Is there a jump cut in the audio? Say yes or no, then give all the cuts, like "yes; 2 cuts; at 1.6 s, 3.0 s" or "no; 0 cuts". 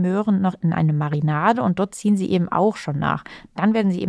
no; 0 cuts